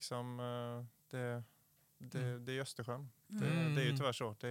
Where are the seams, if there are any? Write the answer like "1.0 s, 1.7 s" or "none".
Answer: none